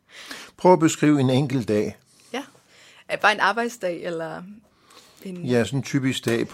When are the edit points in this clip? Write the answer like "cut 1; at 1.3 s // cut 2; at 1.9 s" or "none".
none